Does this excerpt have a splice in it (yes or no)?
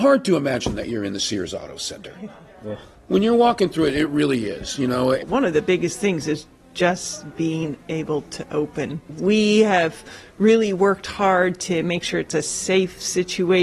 no